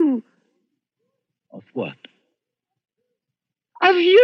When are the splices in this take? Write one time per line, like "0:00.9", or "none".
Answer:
0:01.5